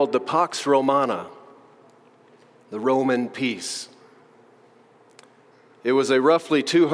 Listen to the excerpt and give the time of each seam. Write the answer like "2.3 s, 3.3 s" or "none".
none